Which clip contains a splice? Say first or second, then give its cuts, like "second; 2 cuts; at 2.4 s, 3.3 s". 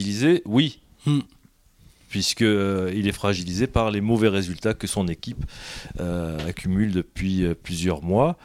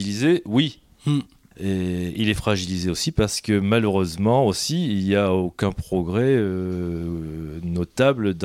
second; 1 cut; at 1.5 s